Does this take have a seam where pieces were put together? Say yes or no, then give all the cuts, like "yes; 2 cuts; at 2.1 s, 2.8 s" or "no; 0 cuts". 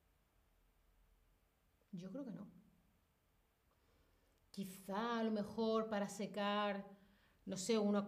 no; 0 cuts